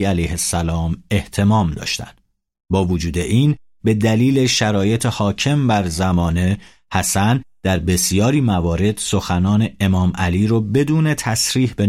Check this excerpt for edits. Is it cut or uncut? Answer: uncut